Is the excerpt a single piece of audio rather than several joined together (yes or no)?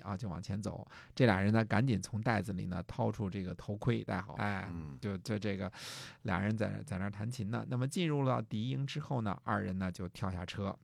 no